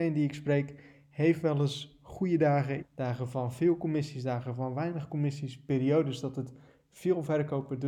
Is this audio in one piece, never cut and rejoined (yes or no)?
no